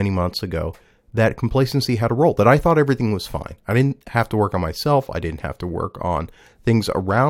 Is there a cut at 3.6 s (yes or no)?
no